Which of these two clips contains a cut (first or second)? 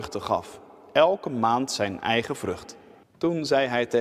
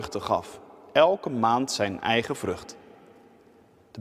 first